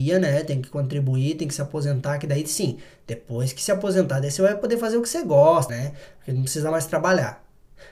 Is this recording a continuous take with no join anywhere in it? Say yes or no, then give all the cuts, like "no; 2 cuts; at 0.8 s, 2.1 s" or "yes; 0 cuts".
no; 1 cut; at 5.7 s